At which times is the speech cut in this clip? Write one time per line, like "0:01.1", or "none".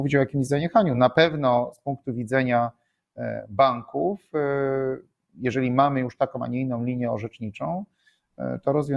none